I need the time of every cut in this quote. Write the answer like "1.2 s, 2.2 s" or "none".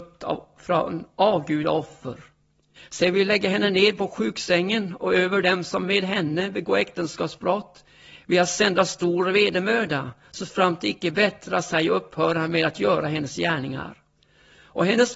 2.8 s